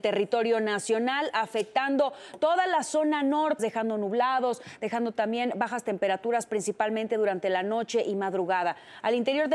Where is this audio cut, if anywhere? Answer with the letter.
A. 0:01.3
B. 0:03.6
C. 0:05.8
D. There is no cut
B